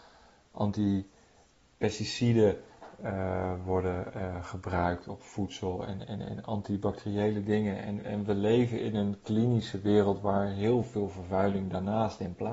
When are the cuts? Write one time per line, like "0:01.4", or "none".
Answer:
none